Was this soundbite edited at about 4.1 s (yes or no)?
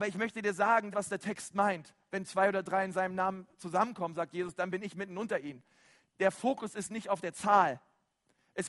no